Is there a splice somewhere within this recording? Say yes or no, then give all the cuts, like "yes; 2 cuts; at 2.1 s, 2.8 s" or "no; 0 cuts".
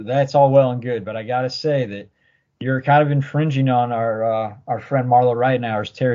no; 0 cuts